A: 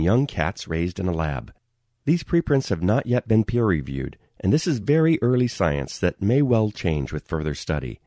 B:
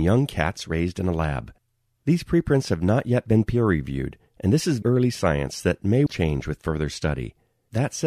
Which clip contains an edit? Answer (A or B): B